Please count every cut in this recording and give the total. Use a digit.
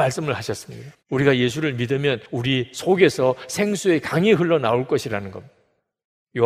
1